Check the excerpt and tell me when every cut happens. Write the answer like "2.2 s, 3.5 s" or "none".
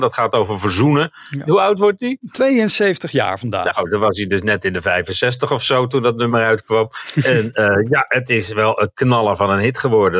1.5 s